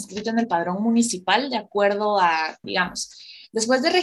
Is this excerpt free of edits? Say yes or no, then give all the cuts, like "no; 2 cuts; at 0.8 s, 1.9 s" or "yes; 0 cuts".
no; 1 cut; at 2.6 s